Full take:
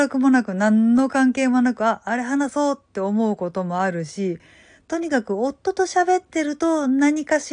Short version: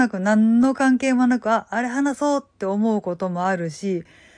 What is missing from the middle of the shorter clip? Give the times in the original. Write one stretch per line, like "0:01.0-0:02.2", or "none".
none